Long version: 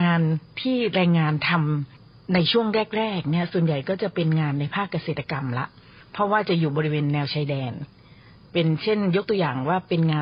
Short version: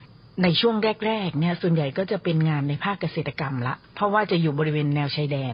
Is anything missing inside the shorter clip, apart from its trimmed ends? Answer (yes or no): yes